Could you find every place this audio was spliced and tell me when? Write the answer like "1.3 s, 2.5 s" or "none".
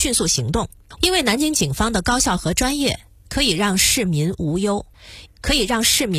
1.0 s, 5.3 s